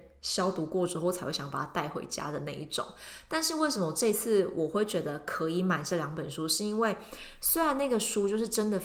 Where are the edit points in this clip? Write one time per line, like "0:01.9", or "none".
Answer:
none